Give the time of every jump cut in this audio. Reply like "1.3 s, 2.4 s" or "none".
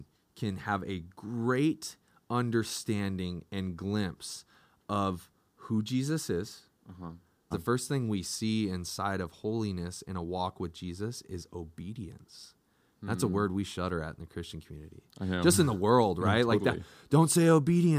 7.5 s